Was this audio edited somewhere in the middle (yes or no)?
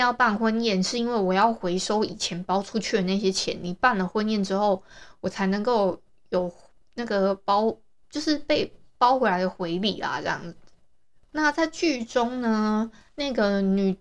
no